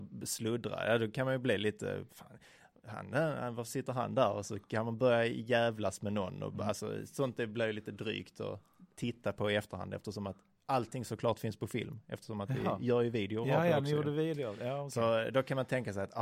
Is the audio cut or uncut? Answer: cut